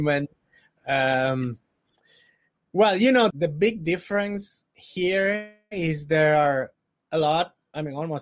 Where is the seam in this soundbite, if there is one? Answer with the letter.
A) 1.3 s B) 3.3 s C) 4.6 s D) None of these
B